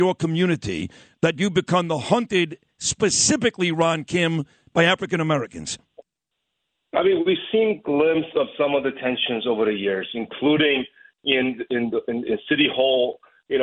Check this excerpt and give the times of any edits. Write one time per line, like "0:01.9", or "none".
none